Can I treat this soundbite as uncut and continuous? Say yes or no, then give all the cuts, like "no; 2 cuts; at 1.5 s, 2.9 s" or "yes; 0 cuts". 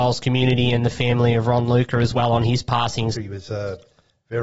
no; 1 cut; at 3.1 s